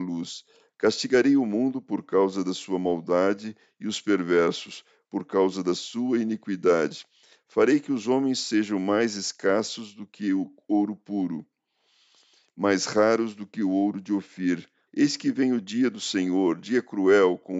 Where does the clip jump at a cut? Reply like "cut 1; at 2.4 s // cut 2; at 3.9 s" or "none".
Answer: cut 1; at 7.4 s // cut 2; at 14.9 s